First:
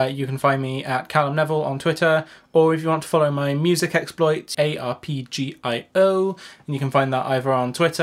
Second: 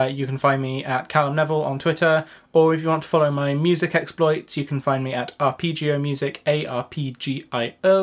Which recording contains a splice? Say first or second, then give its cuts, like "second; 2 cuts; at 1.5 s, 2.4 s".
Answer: first; 1 cut; at 4.5 s